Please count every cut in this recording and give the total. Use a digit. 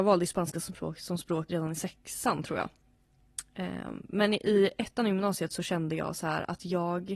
1